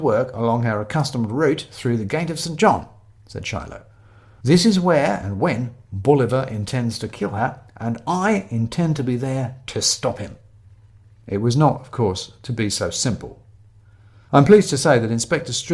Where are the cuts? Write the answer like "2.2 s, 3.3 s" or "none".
none